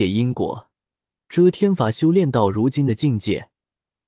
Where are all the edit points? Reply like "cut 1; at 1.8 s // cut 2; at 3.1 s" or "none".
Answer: none